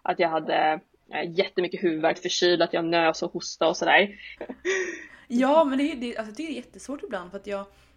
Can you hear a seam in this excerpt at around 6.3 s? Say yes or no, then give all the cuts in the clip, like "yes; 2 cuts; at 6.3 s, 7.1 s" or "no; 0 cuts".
no; 2 cuts; at 2.1 s, 4.4 s